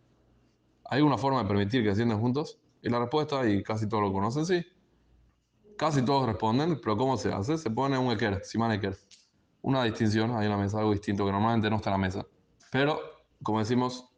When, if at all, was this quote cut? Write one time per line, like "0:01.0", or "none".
0:12.6